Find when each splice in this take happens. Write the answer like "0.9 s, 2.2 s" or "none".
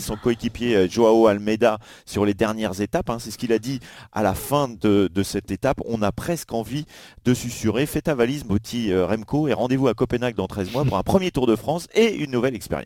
none